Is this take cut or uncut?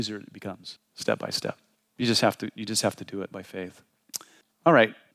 uncut